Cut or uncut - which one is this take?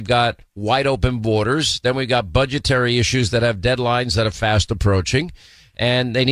uncut